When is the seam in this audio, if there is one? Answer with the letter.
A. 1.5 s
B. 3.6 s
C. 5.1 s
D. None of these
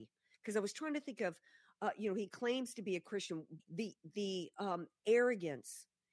B